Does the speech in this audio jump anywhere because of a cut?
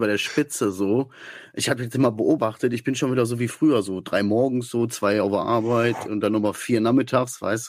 no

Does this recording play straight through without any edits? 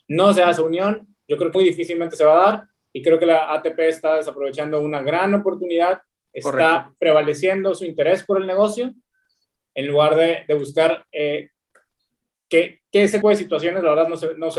no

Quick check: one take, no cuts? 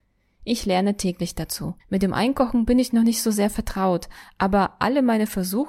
no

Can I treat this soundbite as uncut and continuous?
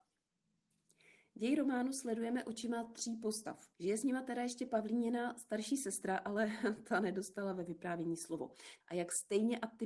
no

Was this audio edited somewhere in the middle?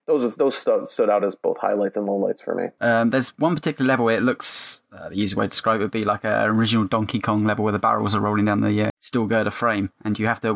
yes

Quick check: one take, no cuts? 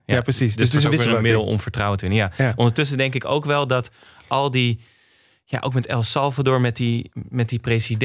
yes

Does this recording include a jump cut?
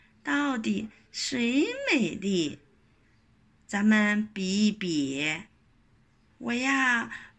yes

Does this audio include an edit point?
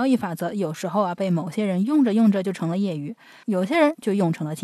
yes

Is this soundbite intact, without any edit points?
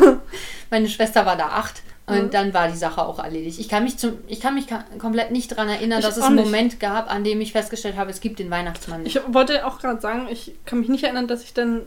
yes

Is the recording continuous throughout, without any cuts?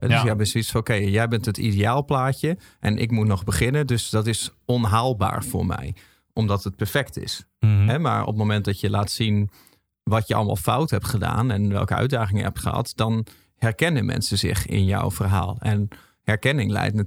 yes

